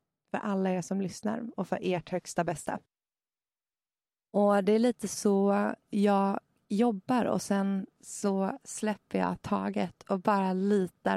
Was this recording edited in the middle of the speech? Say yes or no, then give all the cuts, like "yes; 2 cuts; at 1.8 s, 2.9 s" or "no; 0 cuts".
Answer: no; 0 cuts